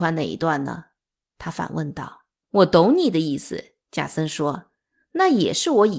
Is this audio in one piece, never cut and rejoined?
no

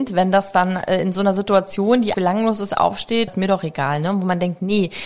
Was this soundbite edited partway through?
yes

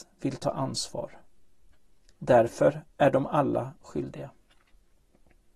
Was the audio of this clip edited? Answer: no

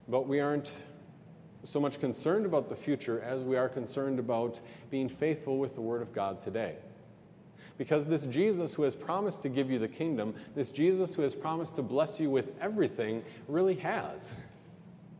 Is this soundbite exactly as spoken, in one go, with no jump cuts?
yes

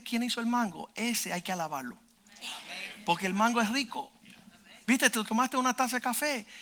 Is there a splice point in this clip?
no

